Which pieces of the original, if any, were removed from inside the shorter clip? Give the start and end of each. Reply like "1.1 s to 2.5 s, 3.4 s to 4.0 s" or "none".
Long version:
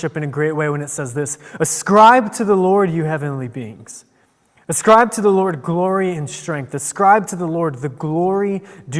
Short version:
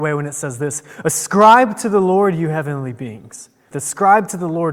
4.3 s to 6.7 s